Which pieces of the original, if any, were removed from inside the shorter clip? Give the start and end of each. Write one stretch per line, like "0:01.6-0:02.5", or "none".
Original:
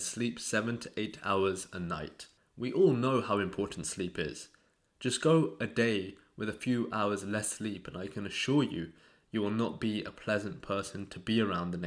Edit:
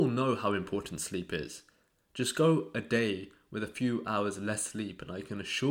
none